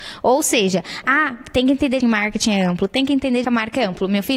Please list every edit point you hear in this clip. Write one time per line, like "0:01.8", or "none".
0:02.0
0:03.4